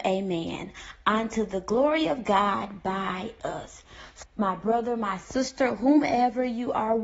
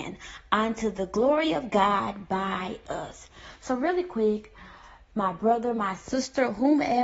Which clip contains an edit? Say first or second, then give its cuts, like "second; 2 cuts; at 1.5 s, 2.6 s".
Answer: first; 1 cut; at 4.2 s